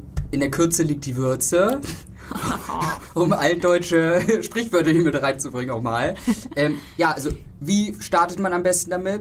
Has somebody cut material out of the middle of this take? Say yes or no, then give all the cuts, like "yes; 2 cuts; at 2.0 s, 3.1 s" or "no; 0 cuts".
no; 0 cuts